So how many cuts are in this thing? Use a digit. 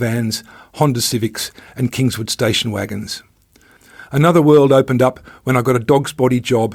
1